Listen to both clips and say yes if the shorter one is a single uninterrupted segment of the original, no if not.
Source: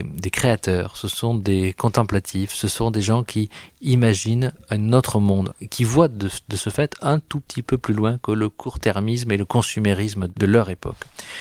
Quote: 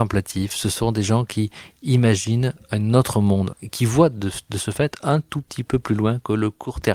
yes